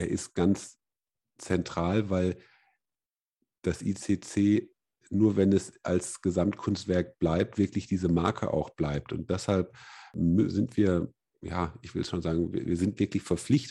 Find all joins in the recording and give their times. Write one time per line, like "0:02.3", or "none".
none